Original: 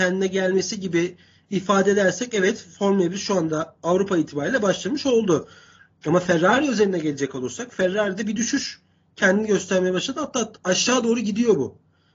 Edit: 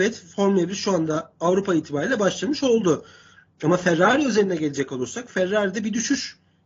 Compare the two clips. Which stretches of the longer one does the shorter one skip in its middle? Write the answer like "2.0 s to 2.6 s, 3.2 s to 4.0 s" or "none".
none

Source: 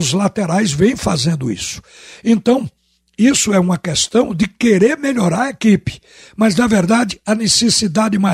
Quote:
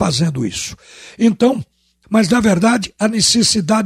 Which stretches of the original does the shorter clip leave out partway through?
3.1 s to 6.3 s

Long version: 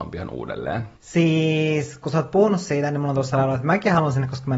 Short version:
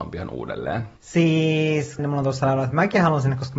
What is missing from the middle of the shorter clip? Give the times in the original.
2.0 s to 2.9 s

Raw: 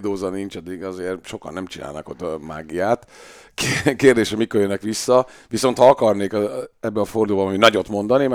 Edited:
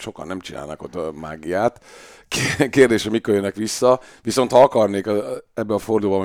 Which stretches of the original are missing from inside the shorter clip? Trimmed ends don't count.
none

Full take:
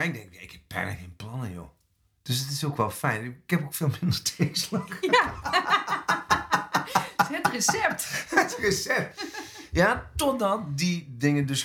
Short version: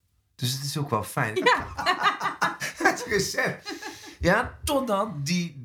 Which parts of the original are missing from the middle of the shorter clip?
3.2 s to 5.0 s, 6.3 s to 8.1 s

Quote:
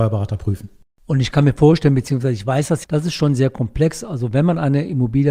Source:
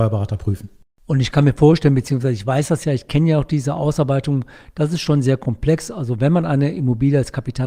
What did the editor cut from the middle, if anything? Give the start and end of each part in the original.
2.8 s to 4.7 s

